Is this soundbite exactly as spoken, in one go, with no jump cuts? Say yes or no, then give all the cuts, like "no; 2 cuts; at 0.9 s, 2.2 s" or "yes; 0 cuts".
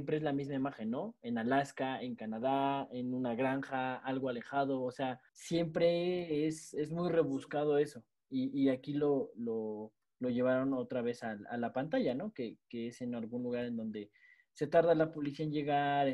no; 1 cut; at 5.3 s